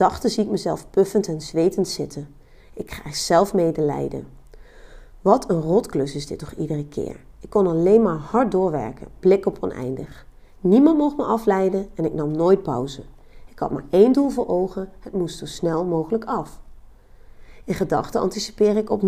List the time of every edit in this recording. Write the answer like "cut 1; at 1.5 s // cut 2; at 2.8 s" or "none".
cut 1; at 7.3 s

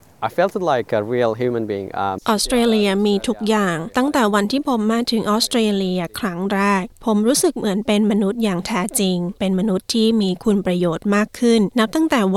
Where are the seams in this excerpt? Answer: cut 1; at 2.2 s // cut 2; at 9.4 s

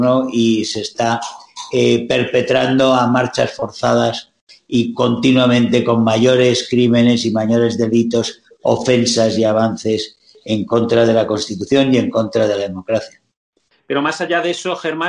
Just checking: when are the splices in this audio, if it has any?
cut 1; at 13.7 s

